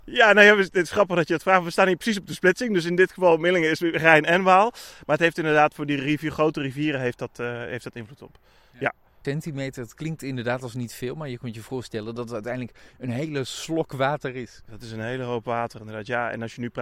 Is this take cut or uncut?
cut